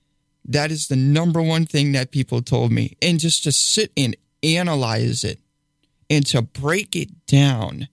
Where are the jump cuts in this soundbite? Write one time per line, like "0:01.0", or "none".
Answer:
0:03.0